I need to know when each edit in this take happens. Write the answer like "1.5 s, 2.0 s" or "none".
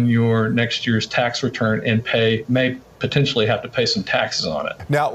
none